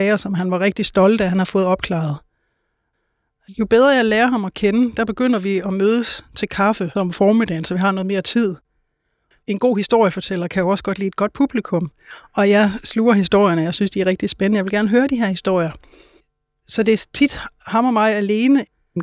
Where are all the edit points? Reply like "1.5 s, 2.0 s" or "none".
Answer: none